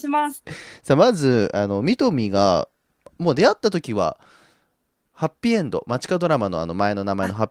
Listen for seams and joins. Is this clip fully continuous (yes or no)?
yes